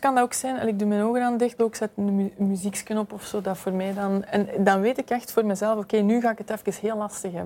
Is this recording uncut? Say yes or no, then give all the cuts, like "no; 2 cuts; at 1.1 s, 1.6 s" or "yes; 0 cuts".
no; 1 cut; at 1.6 s